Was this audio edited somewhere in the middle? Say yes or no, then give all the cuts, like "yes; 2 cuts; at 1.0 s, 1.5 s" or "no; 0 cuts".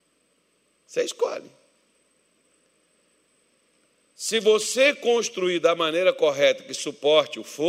no; 0 cuts